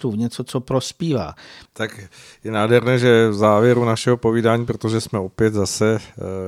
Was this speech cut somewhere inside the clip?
yes; 1 cut; at 1.6 s

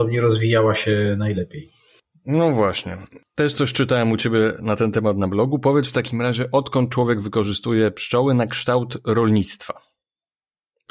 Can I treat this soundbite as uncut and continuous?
yes; 0 cuts

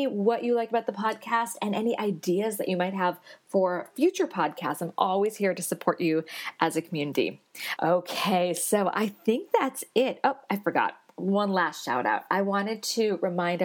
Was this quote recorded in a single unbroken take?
no; 1 cut; at 7.8 s

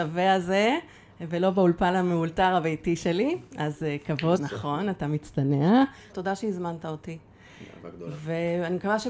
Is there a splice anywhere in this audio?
yes; 2 cuts; at 4.4 s, 6.1 s

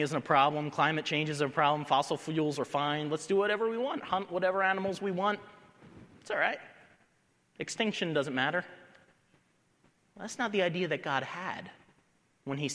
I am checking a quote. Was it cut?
no; 0 cuts

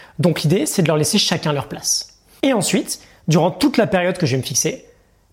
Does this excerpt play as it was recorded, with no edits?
no; 1 cut; at 2.4 s

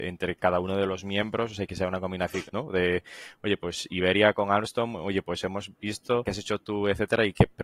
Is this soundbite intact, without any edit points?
no; 2 cuts; at 2.5 s, 6.2 s

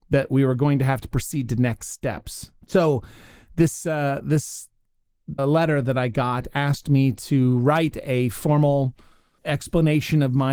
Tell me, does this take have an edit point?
yes; 3 cuts; at 2.6 s, 5.4 s, 9.4 s

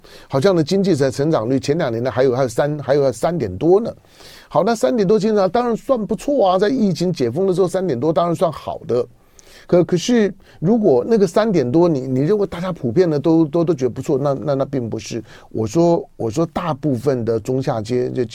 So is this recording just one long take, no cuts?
no; 1 cut; at 8.4 s

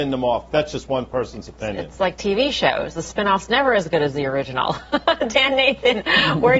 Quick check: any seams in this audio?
no; 0 cuts

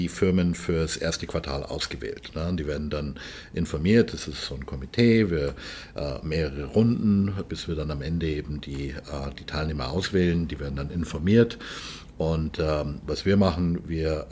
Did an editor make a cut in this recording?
yes; 1 cut; at 7.5 s

